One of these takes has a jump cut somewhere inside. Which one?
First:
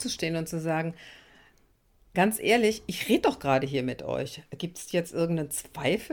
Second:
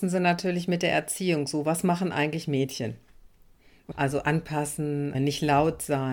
second; 2 cuts; at 3.9 s, 5.1 s

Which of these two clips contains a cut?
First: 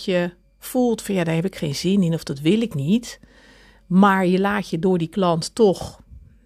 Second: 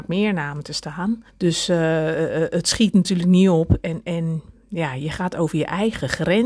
second; 1 cut; at 1.3 s

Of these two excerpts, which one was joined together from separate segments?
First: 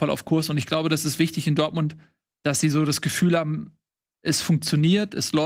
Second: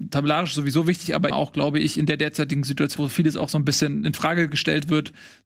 second; 2 cuts; at 1.3 s, 3.0 s

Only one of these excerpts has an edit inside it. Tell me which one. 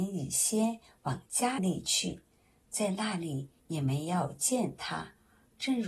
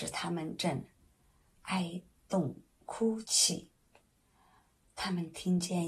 first; 2 cuts; at 1.6 s, 3.6 s

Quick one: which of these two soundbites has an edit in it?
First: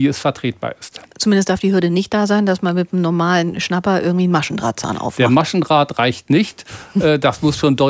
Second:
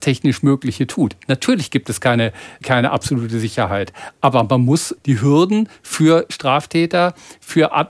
second; 2 cuts; at 2.6 s, 5.0 s

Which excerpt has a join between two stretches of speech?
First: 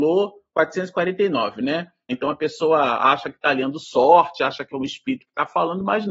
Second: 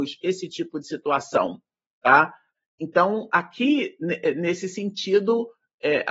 first; 1 cut; at 2.1 s

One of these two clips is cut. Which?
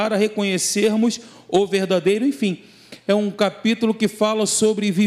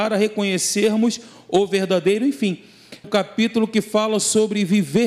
second; 1 cut; at 3.0 s

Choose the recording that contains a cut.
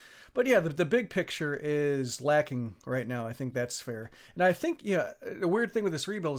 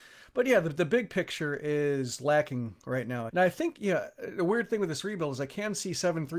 second; 1 cut; at 3.3 s

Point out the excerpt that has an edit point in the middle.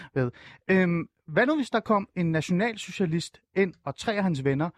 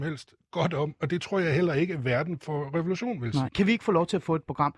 second; 1 cut; at 3.5 s

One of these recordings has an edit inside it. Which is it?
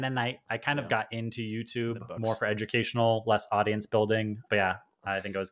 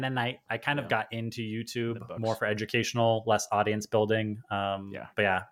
first; 1 cut; at 4.5 s

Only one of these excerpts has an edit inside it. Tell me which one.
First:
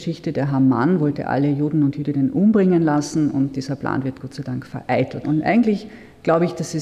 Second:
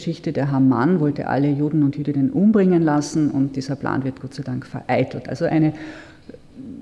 first; 1 cut; at 5.2 s

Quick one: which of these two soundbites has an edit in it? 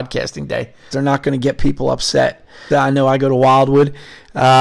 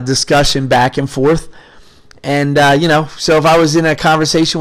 first; 2 cuts; at 0.9 s, 2.7 s

